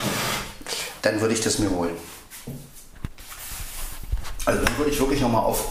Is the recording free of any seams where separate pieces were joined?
no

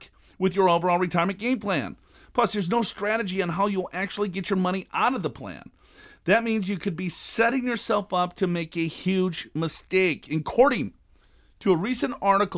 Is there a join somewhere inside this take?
no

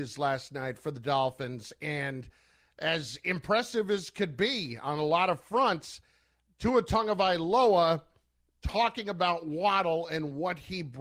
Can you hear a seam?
no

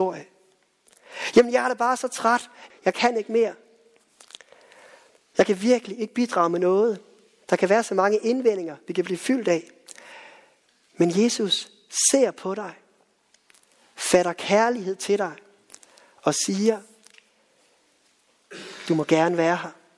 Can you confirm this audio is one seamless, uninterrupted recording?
no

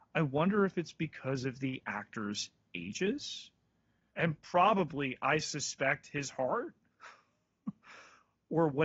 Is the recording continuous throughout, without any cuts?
no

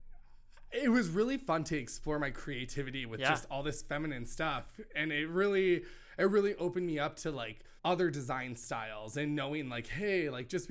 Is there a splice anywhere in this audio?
yes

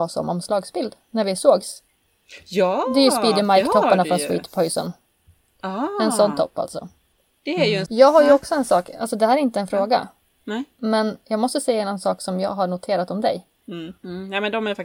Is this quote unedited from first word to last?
no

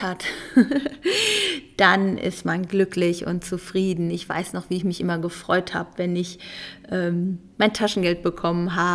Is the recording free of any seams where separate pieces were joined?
yes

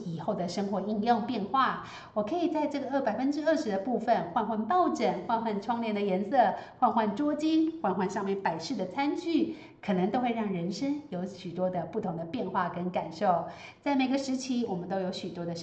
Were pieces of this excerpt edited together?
no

